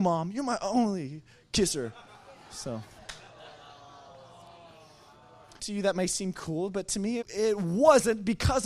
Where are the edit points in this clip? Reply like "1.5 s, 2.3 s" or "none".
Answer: 5.6 s, 7.2 s